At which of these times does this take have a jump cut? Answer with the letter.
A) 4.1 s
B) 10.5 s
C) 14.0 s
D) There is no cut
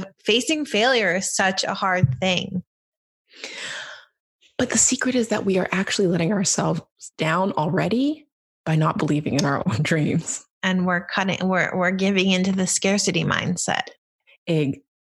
B